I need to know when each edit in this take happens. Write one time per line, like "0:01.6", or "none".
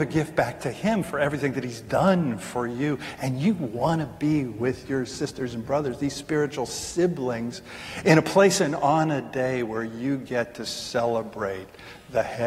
none